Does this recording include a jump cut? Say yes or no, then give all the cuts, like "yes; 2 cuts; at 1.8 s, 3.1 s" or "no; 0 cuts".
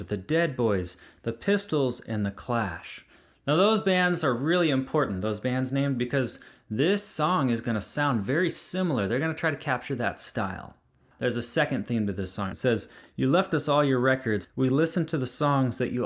yes; 2 cuts; at 12.5 s, 14.4 s